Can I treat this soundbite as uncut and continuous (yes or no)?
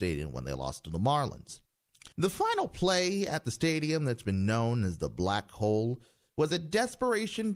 no